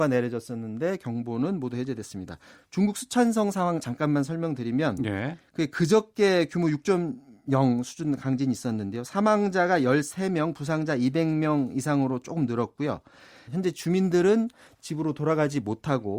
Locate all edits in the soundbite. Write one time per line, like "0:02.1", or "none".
0:13.5